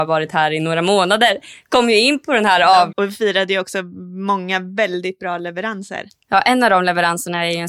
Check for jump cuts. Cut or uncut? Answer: cut